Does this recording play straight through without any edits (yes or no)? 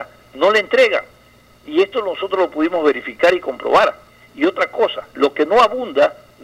no